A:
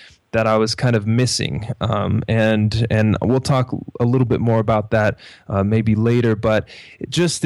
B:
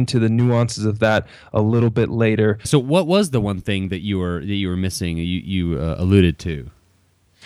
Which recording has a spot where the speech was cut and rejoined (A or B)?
B